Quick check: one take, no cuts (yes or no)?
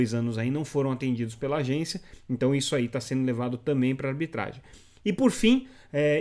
yes